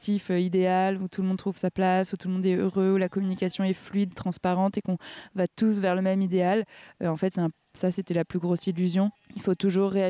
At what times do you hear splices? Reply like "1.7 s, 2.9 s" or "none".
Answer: none